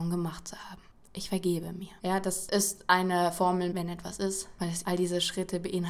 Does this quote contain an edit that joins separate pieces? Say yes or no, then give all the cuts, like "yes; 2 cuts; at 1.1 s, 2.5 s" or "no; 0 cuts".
yes; 3 cuts; at 2.0 s, 3.7 s, 4.8 s